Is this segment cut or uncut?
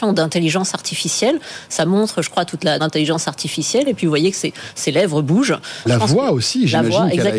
cut